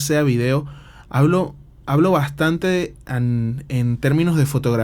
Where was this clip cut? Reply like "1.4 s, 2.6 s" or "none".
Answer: none